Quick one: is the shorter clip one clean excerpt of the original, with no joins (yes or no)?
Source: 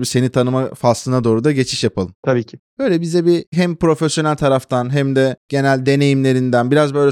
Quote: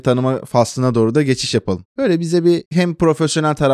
no